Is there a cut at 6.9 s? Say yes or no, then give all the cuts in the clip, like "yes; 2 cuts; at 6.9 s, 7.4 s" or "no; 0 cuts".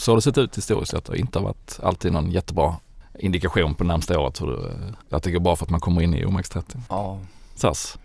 yes; 2 cuts; at 5.0 s, 6.9 s